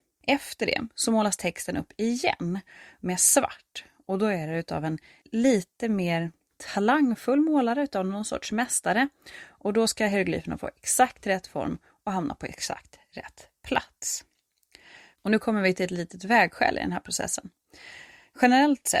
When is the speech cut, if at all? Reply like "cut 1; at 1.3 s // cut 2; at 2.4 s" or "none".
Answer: cut 1; at 15.1 s